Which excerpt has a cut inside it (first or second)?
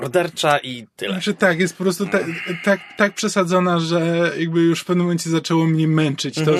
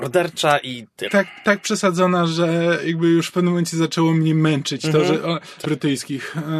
second